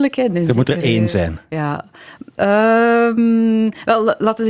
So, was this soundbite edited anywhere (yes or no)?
no